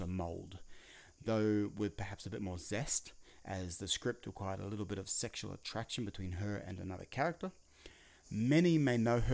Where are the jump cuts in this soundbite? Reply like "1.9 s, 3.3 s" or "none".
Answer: 8.2 s